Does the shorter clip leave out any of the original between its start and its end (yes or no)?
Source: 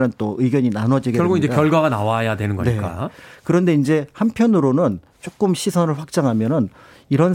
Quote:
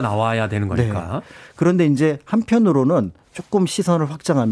no